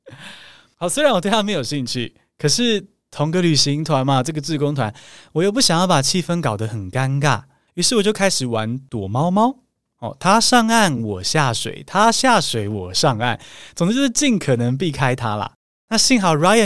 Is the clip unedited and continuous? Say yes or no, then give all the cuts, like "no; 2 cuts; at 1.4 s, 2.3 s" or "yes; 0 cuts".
yes; 0 cuts